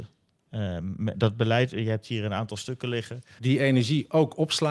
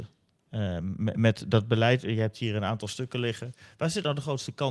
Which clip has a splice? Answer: first; 2 cuts; at 1.1 s, 3.4 s

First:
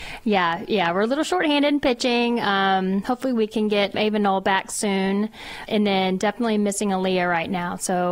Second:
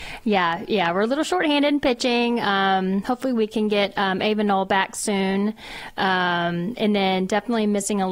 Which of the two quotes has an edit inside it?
first; 2 cuts; at 3.9 s, 5.7 s

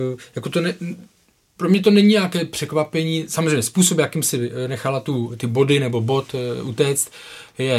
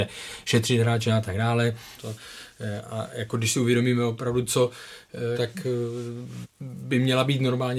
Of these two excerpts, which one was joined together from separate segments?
second; 3 cuts; at 2.0 s, 5.3 s, 6.4 s

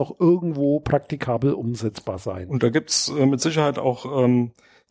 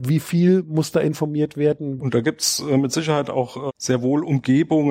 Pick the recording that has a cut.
second; 2 cuts; at 2.0 s, 3.7 s

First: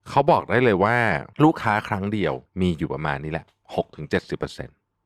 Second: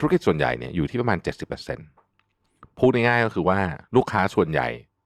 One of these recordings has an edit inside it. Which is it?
first; 2 cuts; at 1.3 s, 2.5 s

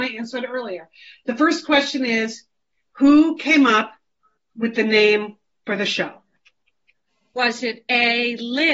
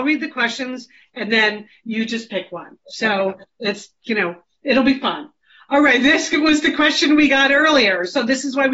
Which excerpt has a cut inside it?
second; 1 cut; at 1.0 s

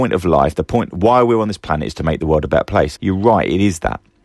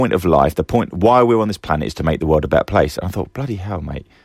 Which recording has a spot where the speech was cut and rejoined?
first; 1 cut; at 3.0 s

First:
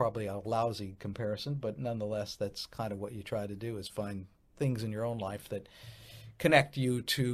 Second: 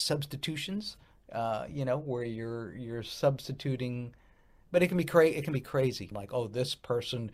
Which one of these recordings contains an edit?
second; 1 cut; at 6.1 s

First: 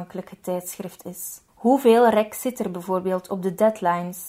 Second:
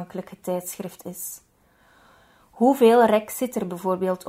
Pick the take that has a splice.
first; 1 cut; at 1.5 s

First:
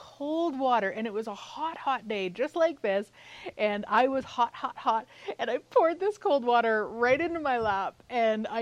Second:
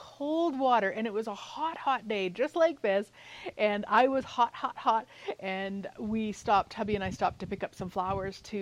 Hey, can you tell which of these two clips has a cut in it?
second; 1 cut; at 5.4 s

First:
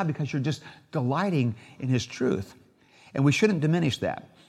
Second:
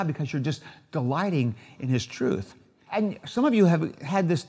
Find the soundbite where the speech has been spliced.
second; 1 cut; at 2.9 s

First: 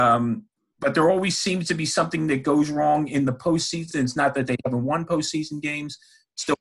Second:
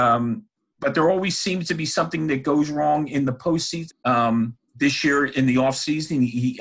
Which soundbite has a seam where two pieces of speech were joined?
second; 1 cut; at 3.9 s

